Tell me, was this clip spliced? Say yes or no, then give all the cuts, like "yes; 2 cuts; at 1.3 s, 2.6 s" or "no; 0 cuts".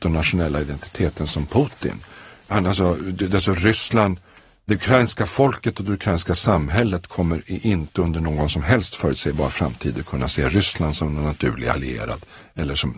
no; 0 cuts